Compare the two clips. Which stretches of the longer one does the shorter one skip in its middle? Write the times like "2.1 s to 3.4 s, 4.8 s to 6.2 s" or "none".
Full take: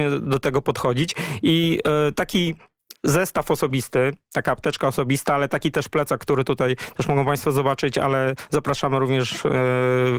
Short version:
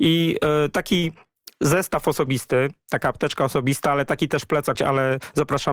6.2 s to 7.9 s